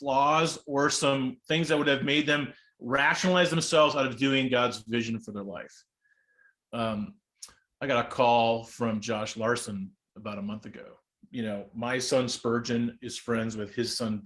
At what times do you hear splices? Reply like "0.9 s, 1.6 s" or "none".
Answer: 11.3 s